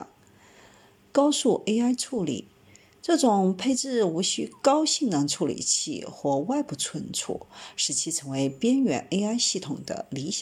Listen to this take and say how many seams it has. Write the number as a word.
one